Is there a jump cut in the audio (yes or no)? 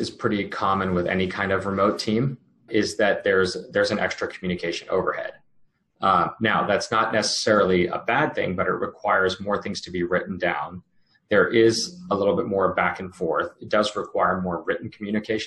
yes